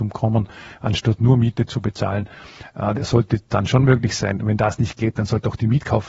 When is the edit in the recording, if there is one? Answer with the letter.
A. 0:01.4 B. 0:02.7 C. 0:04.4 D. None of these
B